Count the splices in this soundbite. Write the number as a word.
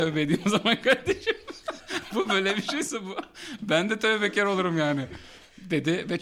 one